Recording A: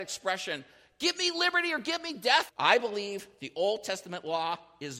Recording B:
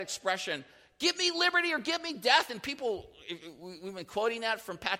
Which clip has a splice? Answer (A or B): A